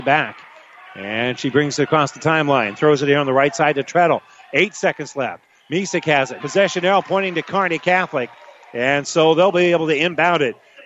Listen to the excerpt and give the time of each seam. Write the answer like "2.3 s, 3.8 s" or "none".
6.4 s